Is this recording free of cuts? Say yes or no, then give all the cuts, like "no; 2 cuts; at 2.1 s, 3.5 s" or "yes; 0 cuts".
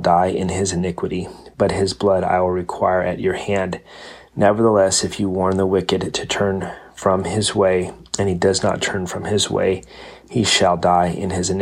yes; 0 cuts